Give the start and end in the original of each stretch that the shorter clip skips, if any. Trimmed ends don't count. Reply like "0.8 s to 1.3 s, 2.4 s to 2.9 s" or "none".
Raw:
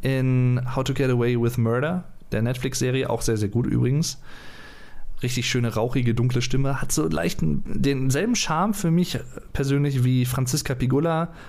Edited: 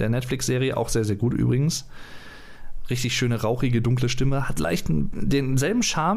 6.9 s to 7.1 s